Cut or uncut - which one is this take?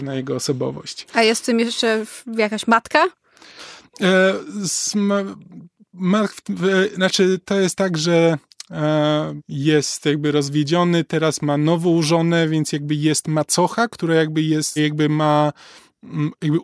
cut